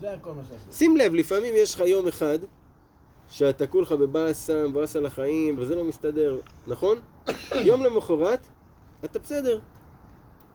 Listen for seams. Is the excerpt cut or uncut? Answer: cut